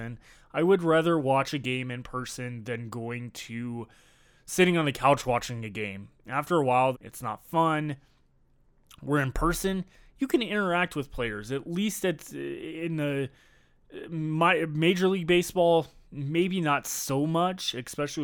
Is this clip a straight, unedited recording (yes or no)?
no